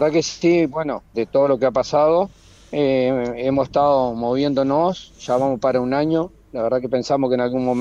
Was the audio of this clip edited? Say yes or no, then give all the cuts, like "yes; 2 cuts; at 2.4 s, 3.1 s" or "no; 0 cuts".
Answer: yes; 1 cut; at 1.1 s